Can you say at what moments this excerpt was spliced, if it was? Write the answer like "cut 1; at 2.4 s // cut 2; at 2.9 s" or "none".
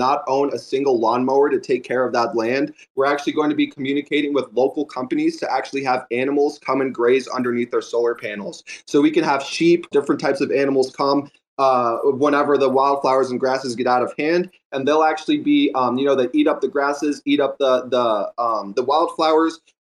cut 1; at 9.9 s